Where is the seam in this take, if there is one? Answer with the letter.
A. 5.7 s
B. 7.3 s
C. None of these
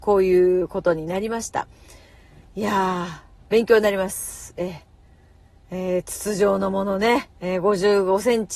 B